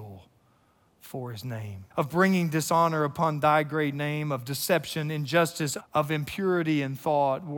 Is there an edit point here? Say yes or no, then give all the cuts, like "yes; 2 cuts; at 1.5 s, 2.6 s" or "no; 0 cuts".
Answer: yes; 2 cuts; at 1.9 s, 5.8 s